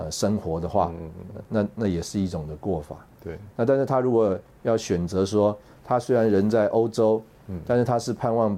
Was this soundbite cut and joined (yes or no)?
no